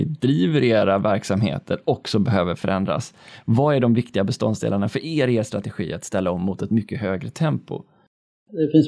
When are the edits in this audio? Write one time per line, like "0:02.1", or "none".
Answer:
none